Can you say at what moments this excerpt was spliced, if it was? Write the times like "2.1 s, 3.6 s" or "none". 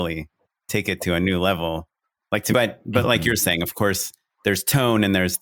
2.5 s